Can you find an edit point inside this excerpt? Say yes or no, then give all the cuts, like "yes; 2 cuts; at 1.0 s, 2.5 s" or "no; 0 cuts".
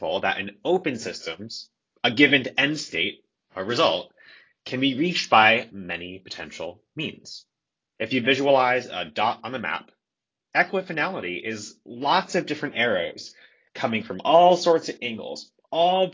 yes; 1 cut; at 8.0 s